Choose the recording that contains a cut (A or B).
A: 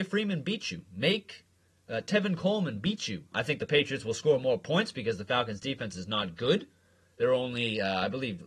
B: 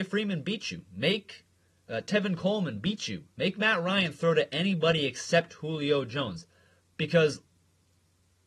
A